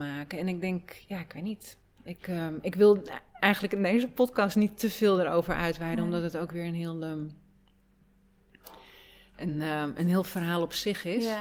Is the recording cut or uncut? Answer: uncut